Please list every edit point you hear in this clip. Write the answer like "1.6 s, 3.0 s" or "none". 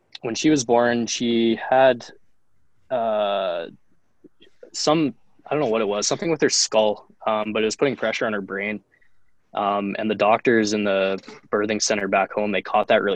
none